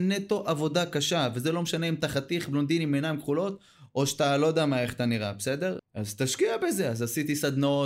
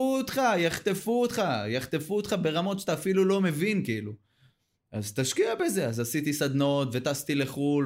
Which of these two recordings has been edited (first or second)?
first